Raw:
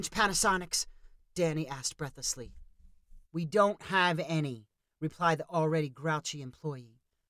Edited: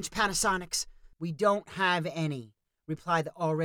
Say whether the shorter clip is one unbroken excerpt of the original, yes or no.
no